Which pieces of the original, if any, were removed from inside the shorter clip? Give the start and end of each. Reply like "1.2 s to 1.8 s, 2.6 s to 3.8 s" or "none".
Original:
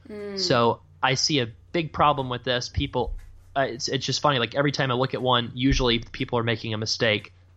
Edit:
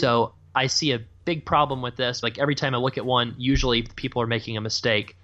2.7 s to 4.4 s